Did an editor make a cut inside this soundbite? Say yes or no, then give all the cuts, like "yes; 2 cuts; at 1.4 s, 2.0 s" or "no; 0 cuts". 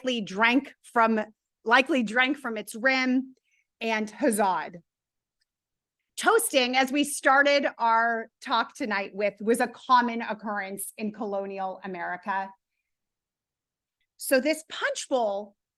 yes; 1 cut; at 14.0 s